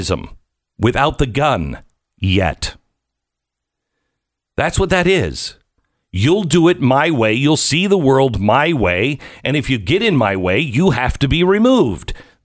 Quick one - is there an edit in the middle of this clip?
no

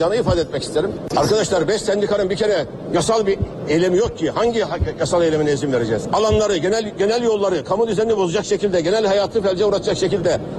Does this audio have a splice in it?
no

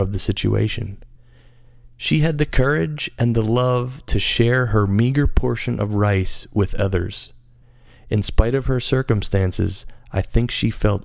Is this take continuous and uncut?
yes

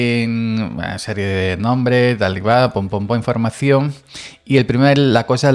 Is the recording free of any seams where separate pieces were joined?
yes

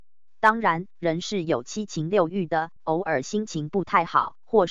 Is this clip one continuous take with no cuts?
yes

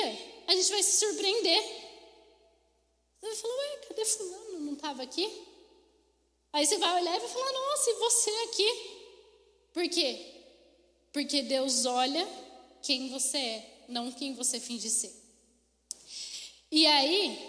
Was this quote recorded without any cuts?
yes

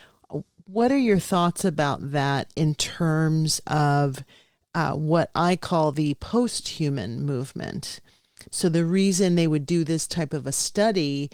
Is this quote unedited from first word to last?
no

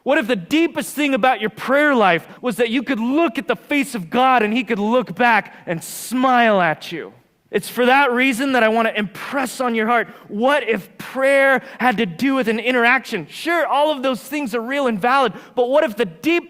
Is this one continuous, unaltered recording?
no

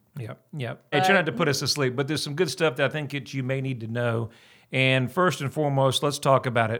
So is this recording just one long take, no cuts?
no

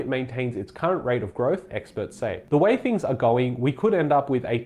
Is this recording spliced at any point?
yes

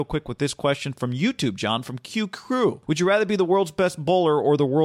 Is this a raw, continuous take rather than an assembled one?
no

